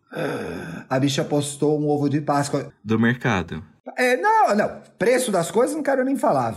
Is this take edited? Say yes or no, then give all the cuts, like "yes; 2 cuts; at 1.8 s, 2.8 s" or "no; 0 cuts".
yes; 1 cut; at 2.7 s